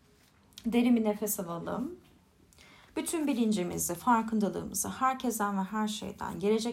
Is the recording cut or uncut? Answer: uncut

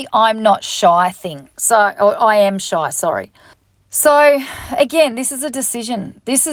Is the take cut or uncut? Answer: uncut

